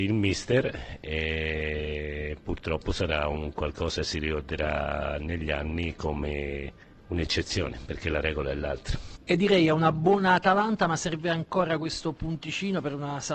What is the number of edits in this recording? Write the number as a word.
one